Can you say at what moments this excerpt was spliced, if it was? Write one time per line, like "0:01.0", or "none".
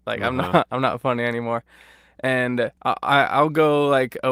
0:02.8